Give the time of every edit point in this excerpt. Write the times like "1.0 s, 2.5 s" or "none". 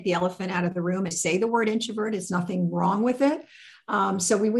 1.1 s